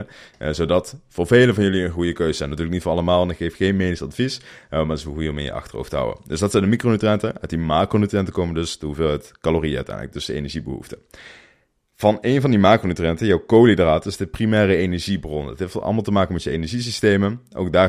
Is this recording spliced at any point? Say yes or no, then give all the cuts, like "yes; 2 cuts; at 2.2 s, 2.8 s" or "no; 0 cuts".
no; 0 cuts